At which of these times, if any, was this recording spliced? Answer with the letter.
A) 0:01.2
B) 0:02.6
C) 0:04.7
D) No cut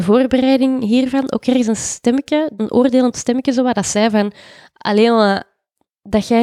B